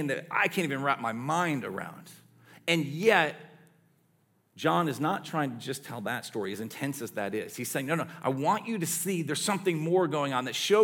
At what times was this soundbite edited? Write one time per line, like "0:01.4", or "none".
none